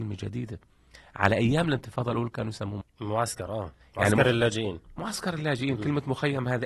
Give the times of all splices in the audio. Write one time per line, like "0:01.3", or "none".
0:02.8